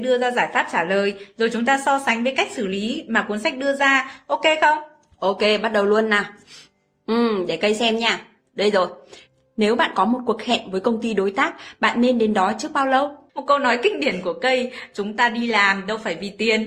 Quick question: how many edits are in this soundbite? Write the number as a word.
one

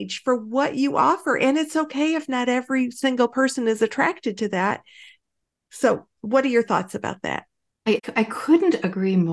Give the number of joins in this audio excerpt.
zero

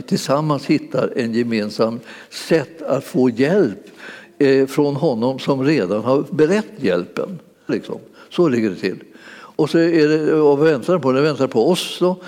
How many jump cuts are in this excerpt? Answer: one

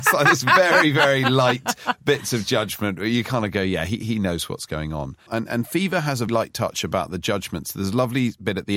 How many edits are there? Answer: two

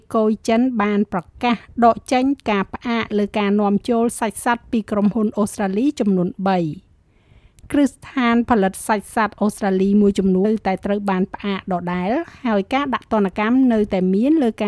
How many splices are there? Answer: one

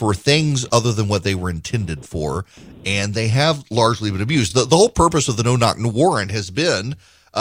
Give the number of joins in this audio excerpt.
zero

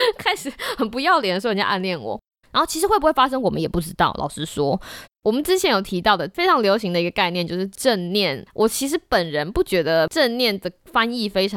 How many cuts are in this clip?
two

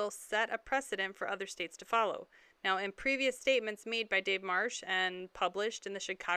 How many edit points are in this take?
zero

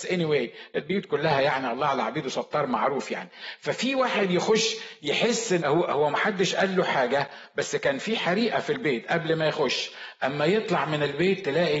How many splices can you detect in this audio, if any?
one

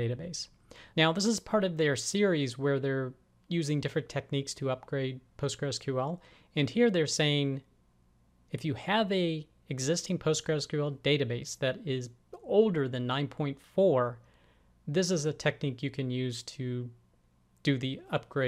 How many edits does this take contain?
one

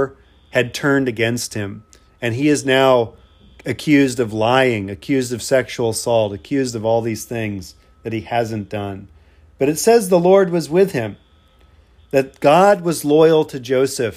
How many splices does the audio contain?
one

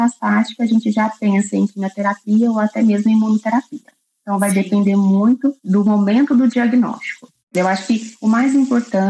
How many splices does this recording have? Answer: one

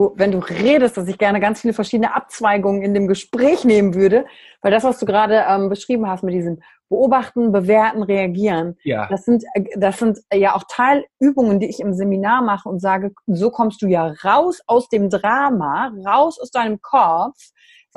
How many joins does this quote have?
zero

